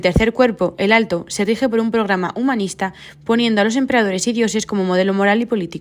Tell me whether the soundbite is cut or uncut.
uncut